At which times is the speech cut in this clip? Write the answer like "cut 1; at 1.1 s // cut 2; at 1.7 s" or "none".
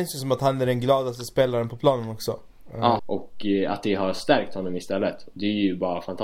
cut 1; at 3.0 s

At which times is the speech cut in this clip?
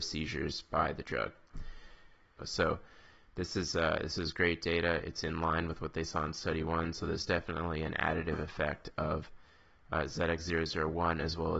cut 1; at 2.4 s

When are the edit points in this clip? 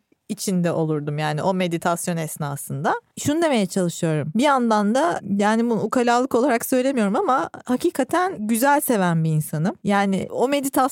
none

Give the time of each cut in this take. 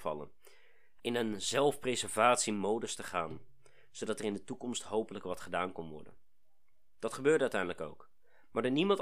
cut 1; at 1.0 s

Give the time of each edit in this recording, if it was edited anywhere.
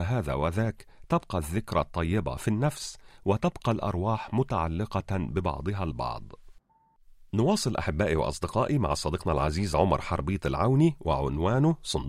none

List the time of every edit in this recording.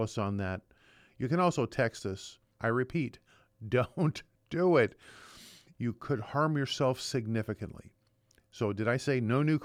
cut 1; at 2.6 s

